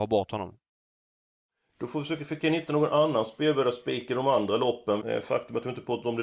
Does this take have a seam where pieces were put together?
yes; 1 cut; at 5.0 s

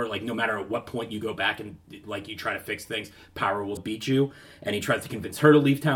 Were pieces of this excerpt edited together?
yes; 1 cut; at 3.8 s

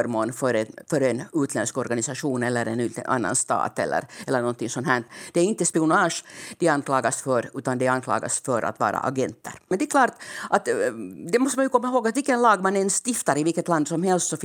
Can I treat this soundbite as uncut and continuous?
yes; 0 cuts

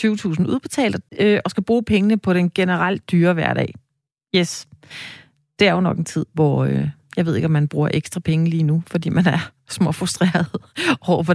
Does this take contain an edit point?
yes; 1 cut; at 1.1 s

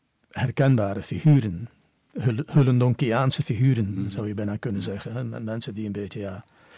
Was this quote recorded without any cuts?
yes; 0 cuts

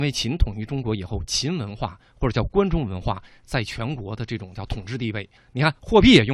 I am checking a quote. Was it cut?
yes; 1 cut; at 5.4 s

